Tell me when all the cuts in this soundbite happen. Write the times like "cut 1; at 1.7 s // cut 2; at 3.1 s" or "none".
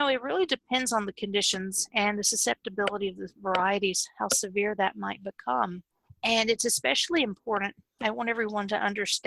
cut 1; at 6.1 s